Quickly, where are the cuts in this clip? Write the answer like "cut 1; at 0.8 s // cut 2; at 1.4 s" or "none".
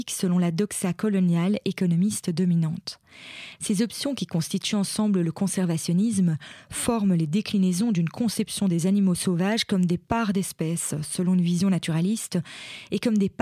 cut 1; at 3.6 s